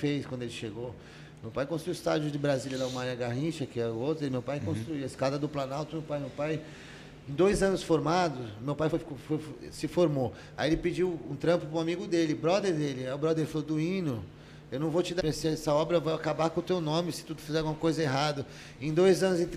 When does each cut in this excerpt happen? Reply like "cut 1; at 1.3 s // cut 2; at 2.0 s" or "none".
cut 1; at 8.9 s // cut 2; at 15.2 s